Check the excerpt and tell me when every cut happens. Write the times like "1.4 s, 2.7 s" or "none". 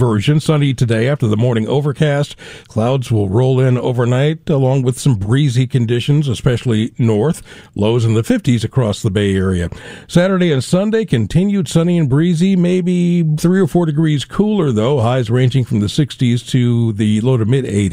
2.6 s

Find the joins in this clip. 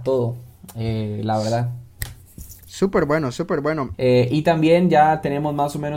3.9 s

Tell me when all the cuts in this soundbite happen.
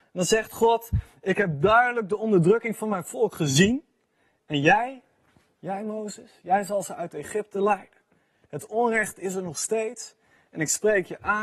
none

